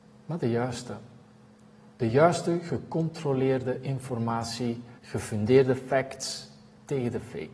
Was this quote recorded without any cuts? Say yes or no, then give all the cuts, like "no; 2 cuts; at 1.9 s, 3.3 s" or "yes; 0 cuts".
no; 1 cut; at 5.0 s